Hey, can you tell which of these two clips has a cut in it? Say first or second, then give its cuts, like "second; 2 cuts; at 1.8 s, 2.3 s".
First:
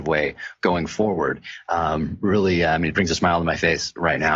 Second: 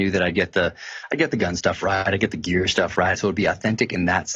second; 1 cut; at 3.1 s